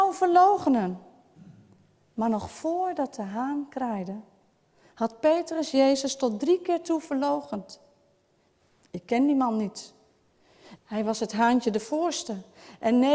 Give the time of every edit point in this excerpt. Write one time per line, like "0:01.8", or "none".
0:10.8